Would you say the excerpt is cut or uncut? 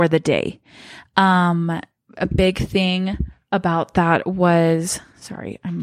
uncut